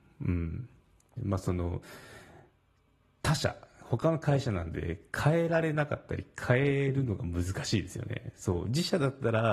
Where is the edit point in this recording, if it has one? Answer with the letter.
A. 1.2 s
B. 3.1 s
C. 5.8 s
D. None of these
A